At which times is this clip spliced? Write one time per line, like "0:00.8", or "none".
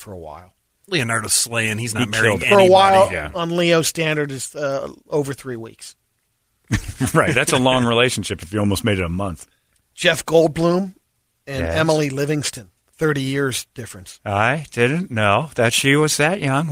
none